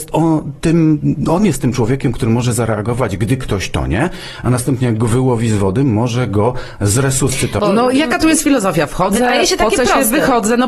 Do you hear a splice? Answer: yes; 1 cut; at 7.6 s

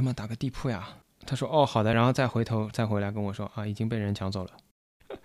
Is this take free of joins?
yes; 0 cuts

